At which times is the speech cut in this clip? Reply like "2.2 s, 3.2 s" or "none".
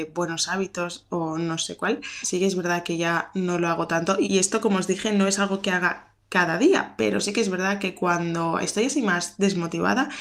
2.2 s